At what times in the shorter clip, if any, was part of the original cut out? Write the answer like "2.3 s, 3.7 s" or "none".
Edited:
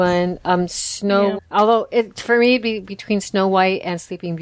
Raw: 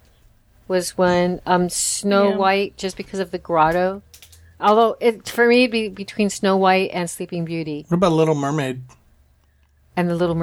1.4 s